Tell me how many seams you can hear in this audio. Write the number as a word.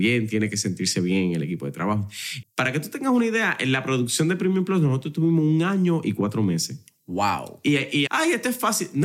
two